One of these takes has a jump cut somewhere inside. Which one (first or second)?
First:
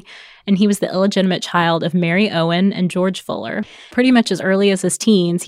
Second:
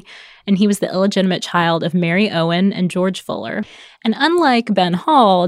first